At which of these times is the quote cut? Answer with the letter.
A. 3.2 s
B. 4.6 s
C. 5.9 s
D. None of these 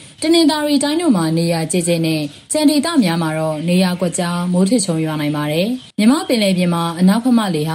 C